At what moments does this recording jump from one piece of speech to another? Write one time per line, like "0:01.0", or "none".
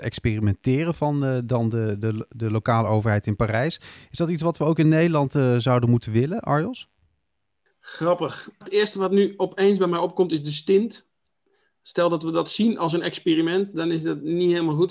0:08.6